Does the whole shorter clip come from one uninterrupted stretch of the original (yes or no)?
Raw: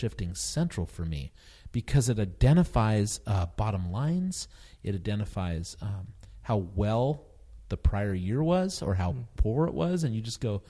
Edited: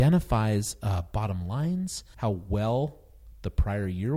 no